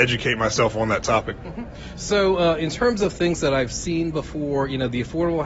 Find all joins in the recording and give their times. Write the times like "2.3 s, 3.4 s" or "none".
none